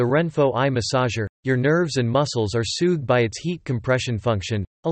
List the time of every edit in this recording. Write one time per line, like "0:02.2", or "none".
0:01.3